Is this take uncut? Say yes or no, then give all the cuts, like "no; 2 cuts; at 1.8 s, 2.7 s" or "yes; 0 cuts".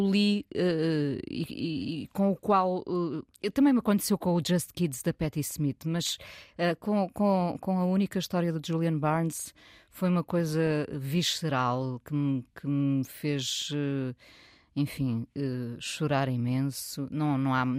yes; 0 cuts